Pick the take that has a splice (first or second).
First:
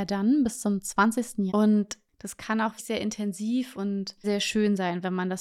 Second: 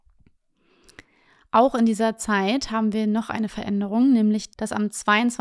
first